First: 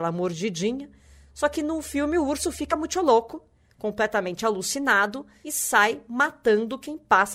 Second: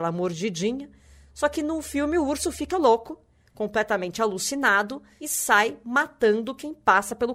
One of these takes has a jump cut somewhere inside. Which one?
second; 1 cut; at 2.7 s

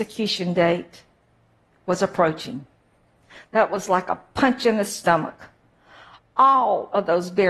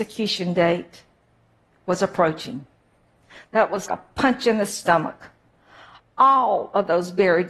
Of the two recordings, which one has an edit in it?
second; 1 cut; at 3.9 s

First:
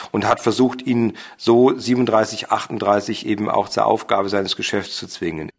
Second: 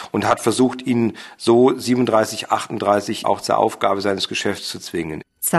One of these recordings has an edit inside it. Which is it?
second; 1 cut; at 3.2 s

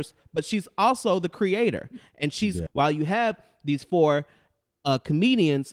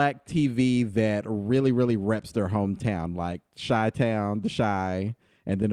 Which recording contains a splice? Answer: first; 1 cut; at 2.7 s

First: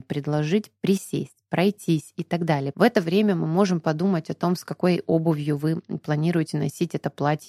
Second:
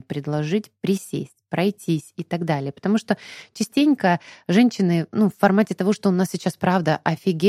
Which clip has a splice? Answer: first; 1 cut; at 2.7 s

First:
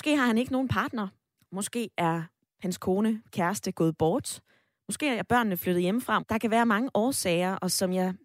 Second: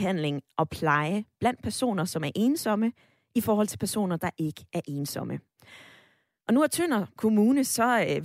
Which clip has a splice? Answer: first; 2 cuts; at 1.4 s, 6.2 s

